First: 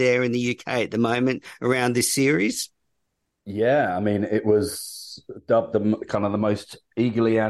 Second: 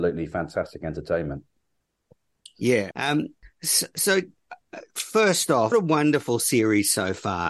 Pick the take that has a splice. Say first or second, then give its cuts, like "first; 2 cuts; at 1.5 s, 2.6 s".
second; 2 cuts; at 2.9 s, 5.7 s